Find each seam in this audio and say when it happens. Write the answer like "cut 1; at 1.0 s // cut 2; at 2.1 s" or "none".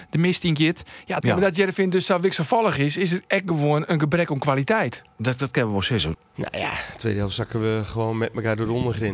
cut 1; at 1.2 s // cut 2; at 6.1 s